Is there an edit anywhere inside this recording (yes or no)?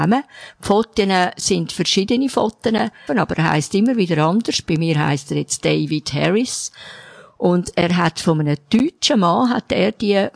yes